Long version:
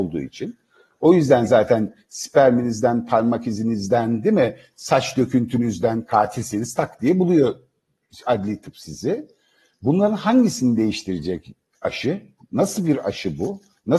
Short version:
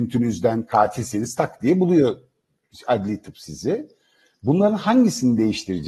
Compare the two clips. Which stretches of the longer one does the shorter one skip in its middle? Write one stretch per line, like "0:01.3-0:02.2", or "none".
none